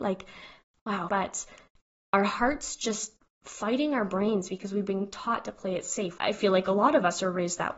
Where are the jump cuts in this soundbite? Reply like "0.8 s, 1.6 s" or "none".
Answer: 1.1 s, 6.2 s